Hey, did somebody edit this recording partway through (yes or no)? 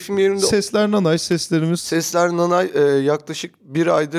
no